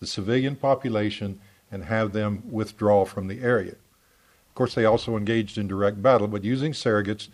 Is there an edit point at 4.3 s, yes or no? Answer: yes